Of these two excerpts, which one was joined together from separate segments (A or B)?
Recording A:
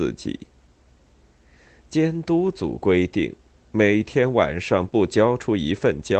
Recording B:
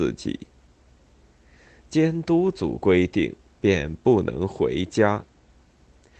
B